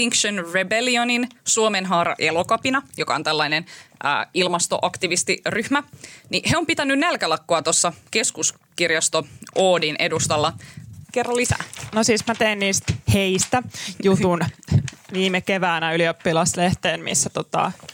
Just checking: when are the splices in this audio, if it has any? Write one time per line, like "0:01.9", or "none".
0:11.0
0:13.0